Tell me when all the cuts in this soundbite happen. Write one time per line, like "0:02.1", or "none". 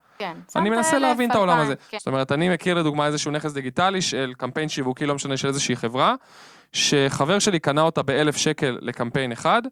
0:02.0